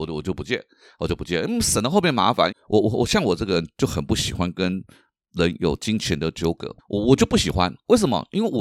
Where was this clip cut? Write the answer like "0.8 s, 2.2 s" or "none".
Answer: 2.5 s, 6.8 s